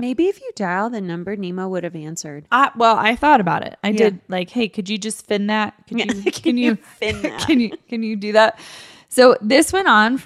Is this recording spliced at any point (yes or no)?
no